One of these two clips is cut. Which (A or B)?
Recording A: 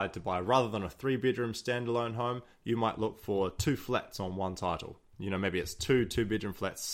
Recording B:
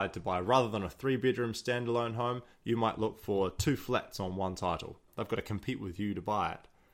B